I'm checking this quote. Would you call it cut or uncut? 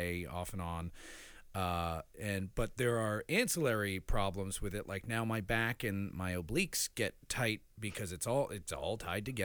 uncut